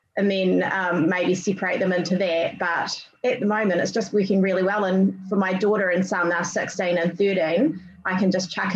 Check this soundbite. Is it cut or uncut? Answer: uncut